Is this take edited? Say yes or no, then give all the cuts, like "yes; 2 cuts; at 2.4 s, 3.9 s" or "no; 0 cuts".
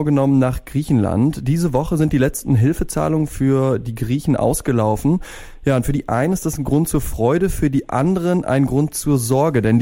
no; 0 cuts